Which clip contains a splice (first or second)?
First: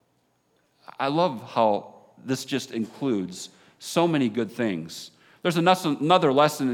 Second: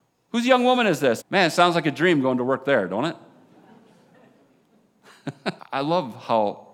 second